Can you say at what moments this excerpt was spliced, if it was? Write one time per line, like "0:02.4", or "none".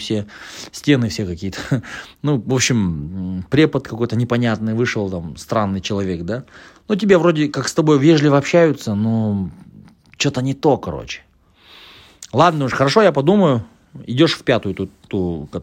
none